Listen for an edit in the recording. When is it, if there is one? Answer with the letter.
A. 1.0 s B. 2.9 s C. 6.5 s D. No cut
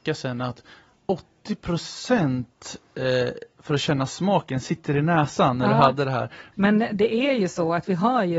C